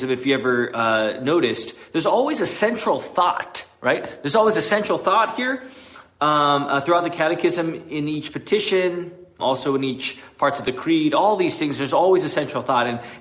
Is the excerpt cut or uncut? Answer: cut